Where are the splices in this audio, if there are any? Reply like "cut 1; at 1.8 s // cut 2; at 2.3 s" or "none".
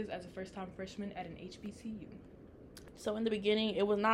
cut 1; at 2.9 s